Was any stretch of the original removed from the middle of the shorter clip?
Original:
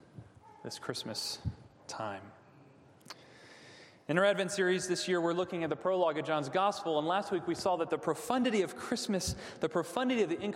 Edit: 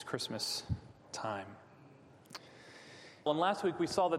yes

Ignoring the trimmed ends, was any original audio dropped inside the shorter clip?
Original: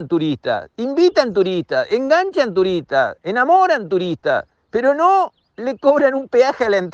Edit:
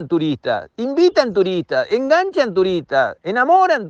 no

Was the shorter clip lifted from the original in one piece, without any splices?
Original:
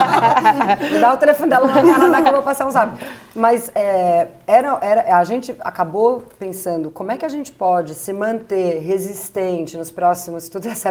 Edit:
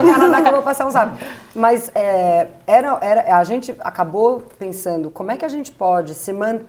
yes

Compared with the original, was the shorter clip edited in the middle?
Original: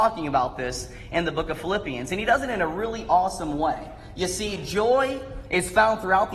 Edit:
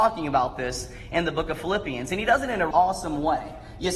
yes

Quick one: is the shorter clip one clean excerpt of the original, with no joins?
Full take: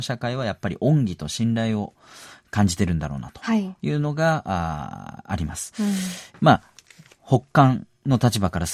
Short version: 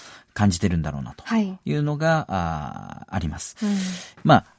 yes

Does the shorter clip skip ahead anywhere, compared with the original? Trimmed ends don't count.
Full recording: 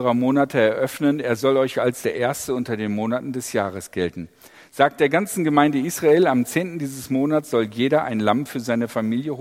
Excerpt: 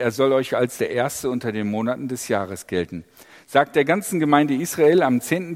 no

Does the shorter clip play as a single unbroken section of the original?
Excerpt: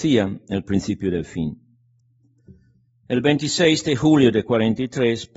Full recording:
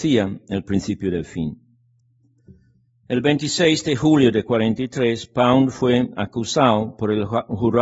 yes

